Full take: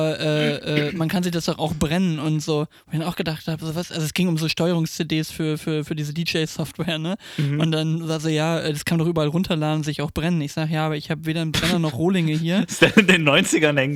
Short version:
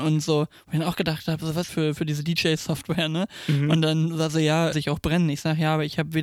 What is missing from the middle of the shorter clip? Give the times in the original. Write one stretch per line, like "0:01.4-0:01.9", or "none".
0:03.9-0:05.6
0:08.6-0:09.8